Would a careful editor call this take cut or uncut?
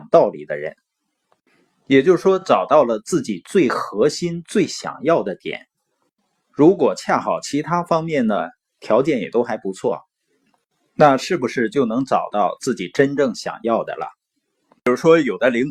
uncut